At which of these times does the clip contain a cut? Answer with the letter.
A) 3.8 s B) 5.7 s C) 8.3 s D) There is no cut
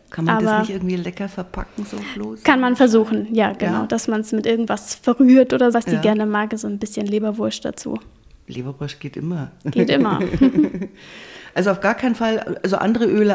B